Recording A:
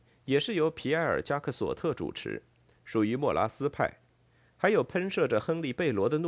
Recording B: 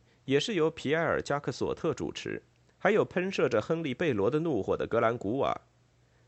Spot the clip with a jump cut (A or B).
B